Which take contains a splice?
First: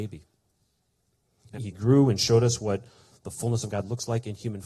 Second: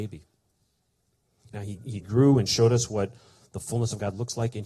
first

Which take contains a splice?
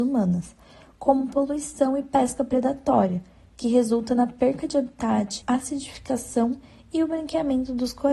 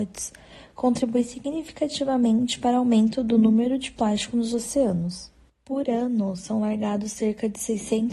first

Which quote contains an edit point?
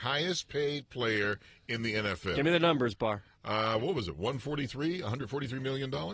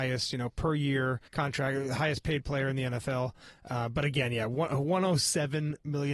second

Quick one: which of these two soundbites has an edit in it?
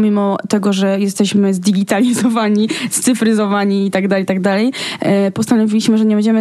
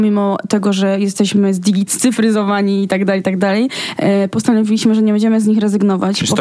second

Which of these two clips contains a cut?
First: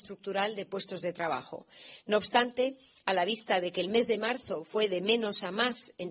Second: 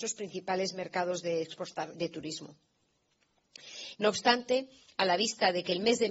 second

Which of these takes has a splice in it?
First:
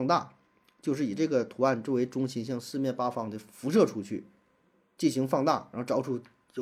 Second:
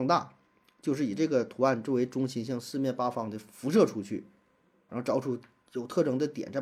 second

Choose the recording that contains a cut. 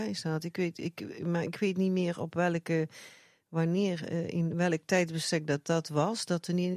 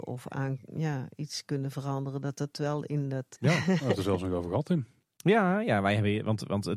second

